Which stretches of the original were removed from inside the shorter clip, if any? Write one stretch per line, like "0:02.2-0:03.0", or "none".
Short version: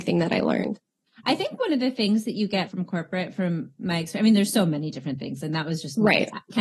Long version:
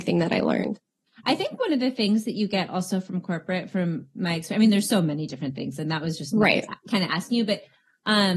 0:02.7-0:03.0